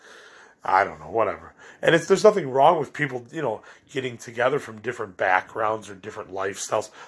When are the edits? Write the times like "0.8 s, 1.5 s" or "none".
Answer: none